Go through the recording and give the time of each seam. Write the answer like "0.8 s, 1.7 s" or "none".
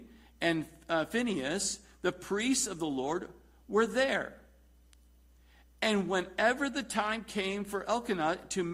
none